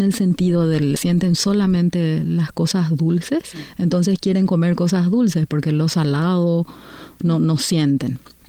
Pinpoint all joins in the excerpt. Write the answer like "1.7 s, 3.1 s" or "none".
1.0 s

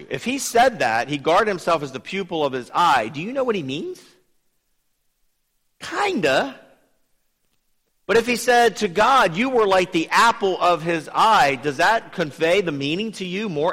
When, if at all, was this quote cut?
none

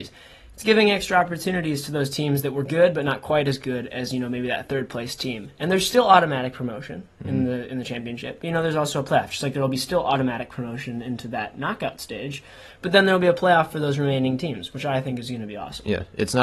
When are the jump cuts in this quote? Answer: none

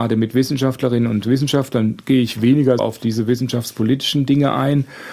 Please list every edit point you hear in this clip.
2.8 s

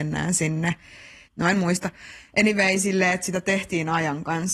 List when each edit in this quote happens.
1.3 s

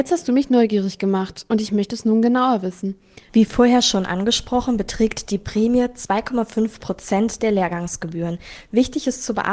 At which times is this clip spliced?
3.3 s

